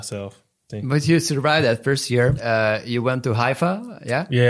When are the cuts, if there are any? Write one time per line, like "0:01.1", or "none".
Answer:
0:02.4